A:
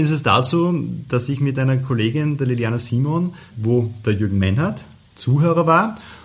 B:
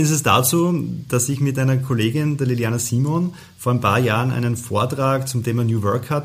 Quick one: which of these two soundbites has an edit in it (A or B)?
A